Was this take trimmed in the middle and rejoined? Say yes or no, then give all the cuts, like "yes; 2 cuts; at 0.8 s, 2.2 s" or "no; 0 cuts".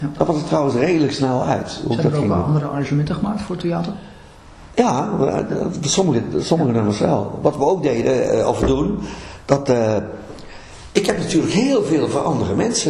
no; 0 cuts